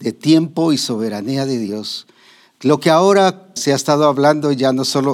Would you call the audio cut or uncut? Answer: cut